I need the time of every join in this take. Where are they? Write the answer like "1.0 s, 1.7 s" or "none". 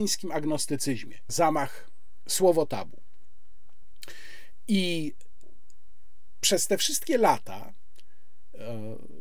1.3 s